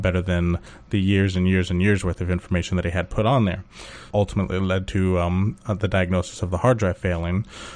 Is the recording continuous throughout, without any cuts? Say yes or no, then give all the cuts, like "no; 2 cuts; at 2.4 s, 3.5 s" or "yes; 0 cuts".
no; 1 cut; at 4.1 s